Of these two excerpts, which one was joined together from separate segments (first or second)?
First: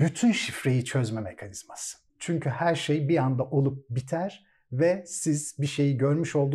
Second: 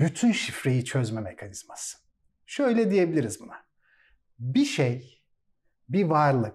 first